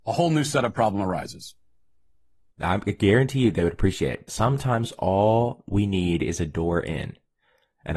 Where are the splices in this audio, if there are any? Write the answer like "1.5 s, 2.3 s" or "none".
2.5 s, 4.3 s